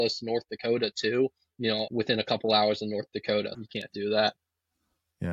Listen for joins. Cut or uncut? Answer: cut